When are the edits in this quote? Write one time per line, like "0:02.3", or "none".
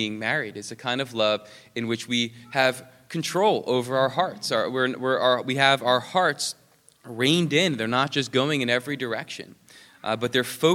none

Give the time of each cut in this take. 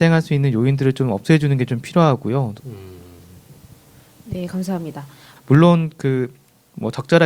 0:02.6
0:05.4

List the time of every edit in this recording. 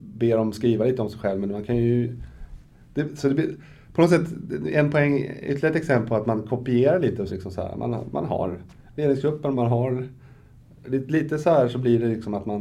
0:07.3
0:09.5

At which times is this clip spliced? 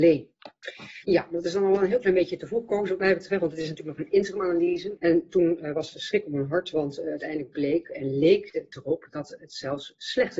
0:01.0
0:05.0

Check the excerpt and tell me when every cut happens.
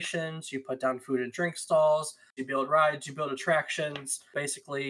0:02.4

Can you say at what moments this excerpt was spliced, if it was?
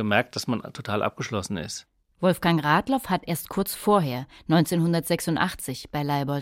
0:02.1

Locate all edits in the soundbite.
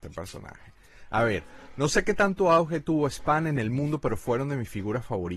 none

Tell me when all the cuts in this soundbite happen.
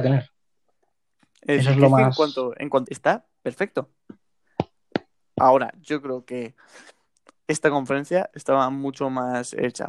0:02.9

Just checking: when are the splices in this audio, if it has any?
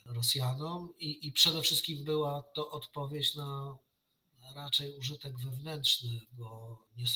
none

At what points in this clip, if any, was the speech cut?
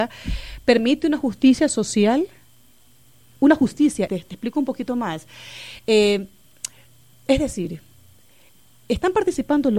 0:04.1

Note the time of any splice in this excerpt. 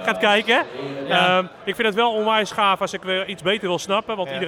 none

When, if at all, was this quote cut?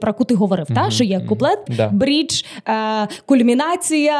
0:01.7

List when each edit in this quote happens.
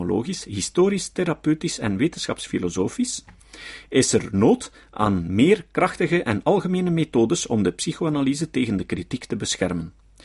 none

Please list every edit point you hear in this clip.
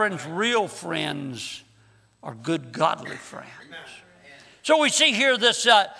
none

